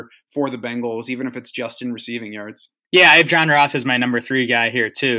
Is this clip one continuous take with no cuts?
yes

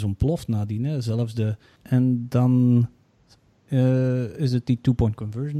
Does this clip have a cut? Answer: yes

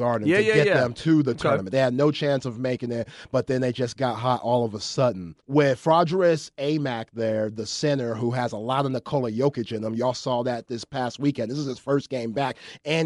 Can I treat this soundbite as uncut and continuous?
no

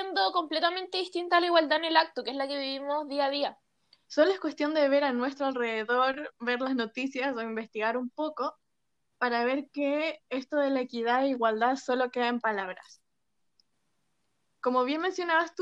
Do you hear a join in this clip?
yes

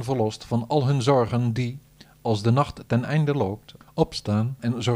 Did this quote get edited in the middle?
no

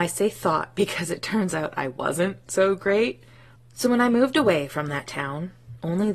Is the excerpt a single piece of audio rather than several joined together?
no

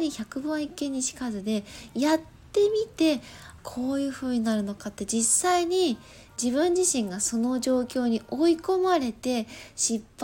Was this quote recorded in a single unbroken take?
no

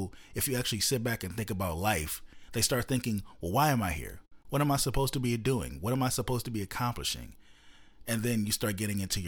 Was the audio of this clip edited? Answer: no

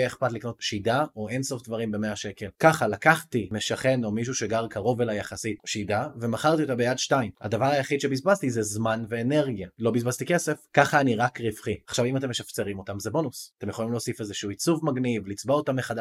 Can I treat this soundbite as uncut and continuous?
yes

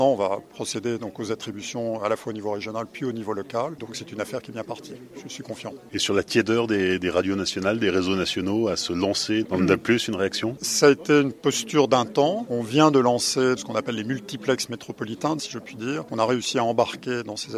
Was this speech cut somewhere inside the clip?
yes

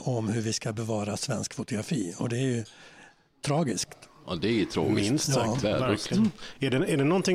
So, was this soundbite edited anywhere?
no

